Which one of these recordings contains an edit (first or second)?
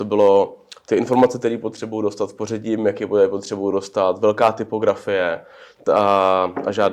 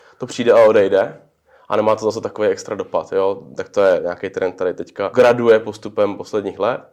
second